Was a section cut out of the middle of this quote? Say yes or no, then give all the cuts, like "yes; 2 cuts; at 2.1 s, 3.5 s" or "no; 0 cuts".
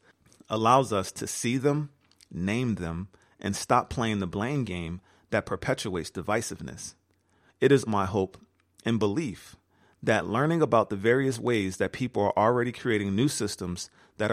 yes; 1 cut; at 7.9 s